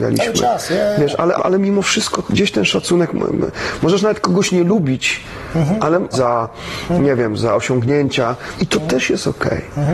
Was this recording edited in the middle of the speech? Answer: yes; 3 cuts; at 1.4 s, 6.1 s, 8.6 s

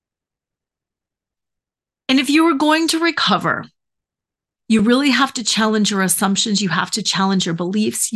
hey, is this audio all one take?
yes; 0 cuts

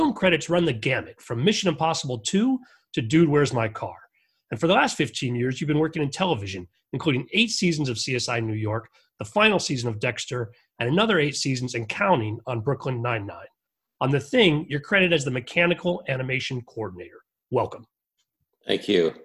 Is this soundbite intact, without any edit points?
yes; 0 cuts

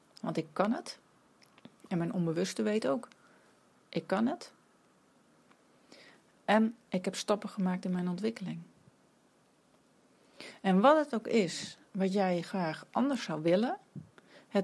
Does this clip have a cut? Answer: no; 0 cuts

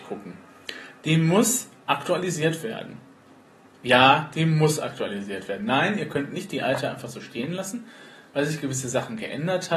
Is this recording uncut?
yes; 0 cuts

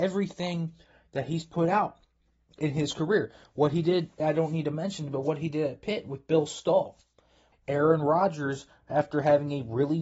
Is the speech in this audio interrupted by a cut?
yes; 2 cuts; at 4.2 s, 7.5 s

